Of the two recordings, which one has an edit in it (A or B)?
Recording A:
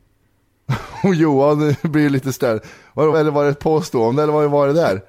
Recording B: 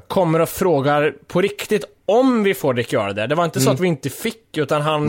A